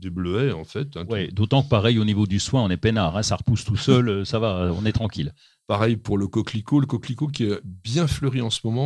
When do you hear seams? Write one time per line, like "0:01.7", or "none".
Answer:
none